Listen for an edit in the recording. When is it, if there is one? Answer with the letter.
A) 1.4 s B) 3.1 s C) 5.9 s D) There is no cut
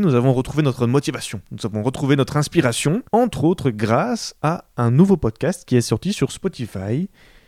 B